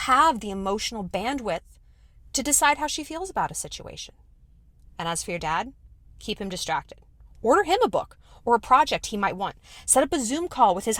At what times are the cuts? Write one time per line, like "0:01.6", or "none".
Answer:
none